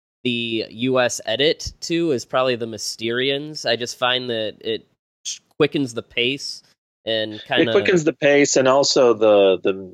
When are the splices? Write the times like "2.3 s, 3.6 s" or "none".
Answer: none